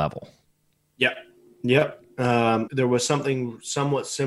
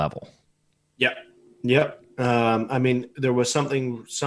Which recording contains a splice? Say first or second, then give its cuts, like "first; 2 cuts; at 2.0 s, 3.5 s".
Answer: first; 1 cut; at 2.7 s